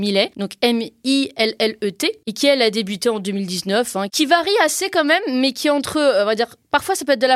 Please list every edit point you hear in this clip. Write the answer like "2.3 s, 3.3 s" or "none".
4.1 s